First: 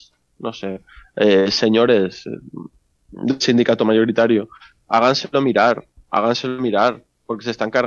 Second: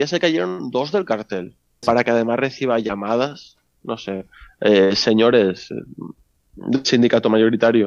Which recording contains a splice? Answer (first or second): second